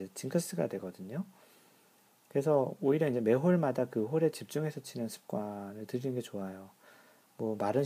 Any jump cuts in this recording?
no; 0 cuts

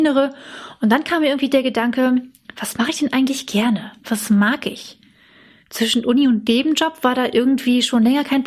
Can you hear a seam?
no; 0 cuts

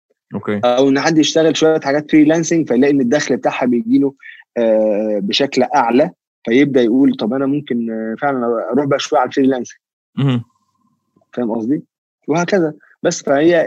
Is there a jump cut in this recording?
no; 0 cuts

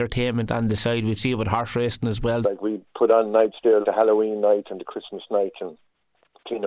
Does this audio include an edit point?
yes; 2 cuts; at 2.4 s, 3.8 s

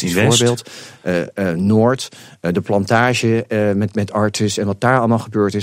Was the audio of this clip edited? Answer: no; 0 cuts

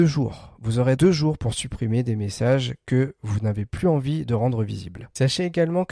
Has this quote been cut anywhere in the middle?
yes; 1 cut; at 1.0 s

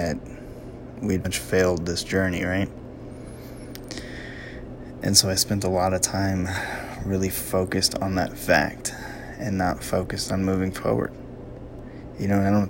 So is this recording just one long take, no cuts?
no; 1 cut; at 1.2 s

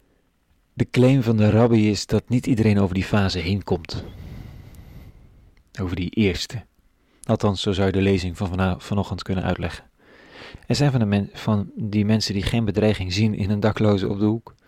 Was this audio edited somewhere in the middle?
yes; 1 cut; at 10.6 s

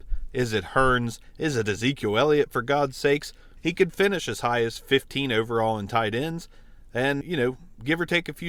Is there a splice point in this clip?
yes; 2 cuts; at 3.6 s, 7.2 s

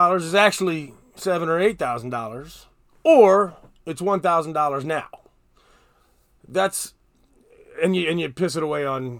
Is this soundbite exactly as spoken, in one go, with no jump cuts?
yes; 0 cuts

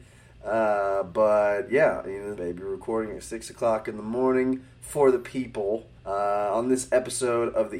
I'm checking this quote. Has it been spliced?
yes; 2 cuts; at 2.4 s, 6.0 s

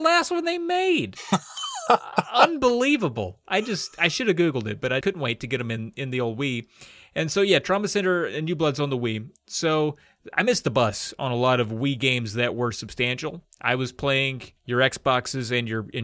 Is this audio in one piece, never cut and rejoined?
no; 2 cuts; at 5.0 s, 14.6 s

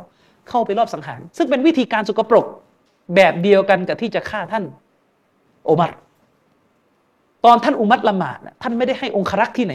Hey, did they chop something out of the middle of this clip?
no; 0 cuts

